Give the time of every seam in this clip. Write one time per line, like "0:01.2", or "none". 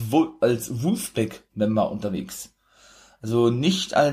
none

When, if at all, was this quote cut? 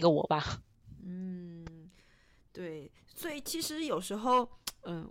none

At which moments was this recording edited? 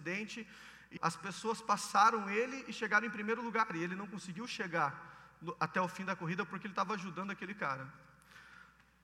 0:01.0

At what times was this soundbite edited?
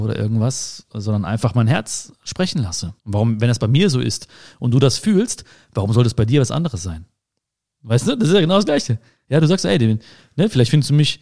0:03.0

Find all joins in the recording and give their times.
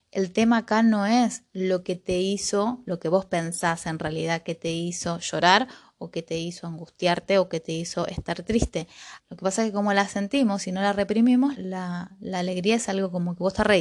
0:09.2
0:11.5

